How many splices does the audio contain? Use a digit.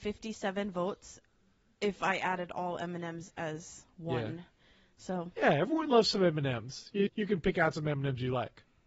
1